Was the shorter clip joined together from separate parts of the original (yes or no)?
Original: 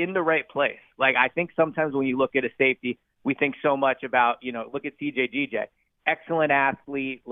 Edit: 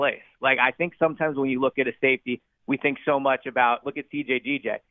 yes